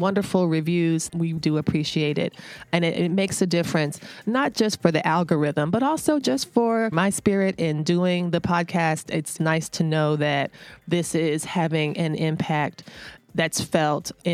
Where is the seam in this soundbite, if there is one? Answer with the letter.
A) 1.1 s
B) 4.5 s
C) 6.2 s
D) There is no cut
A